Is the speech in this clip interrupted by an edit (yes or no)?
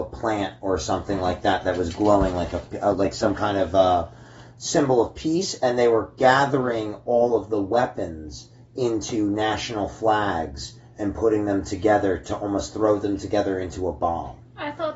no